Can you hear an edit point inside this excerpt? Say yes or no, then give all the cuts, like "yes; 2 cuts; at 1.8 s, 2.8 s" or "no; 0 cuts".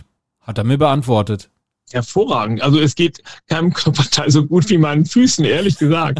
no; 0 cuts